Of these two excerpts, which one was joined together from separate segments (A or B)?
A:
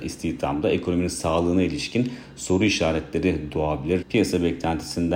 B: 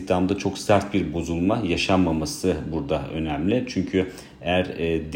A